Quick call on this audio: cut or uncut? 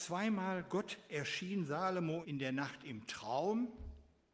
cut